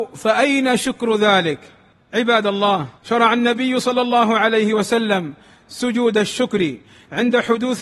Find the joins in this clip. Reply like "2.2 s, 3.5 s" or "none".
3.0 s